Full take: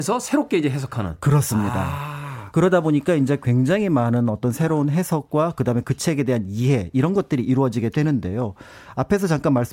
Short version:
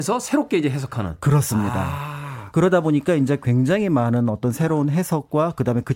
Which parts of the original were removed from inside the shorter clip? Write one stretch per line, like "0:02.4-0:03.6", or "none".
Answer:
none